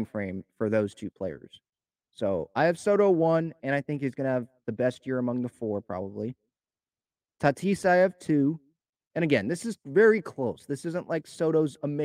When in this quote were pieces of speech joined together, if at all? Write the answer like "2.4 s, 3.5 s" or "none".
none